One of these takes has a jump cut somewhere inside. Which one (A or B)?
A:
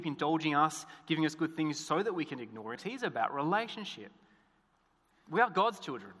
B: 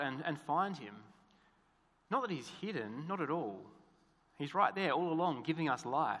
A